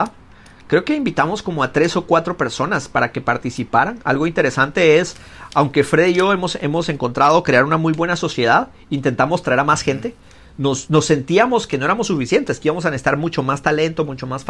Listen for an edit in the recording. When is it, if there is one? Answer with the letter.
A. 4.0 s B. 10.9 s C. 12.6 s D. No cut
B